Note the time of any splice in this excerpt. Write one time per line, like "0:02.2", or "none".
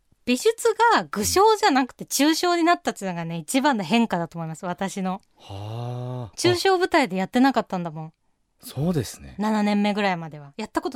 none